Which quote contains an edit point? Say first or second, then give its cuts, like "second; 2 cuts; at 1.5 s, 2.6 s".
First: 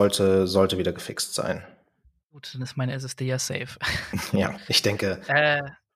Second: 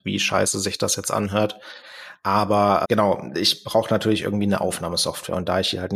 second; 1 cut; at 2.8 s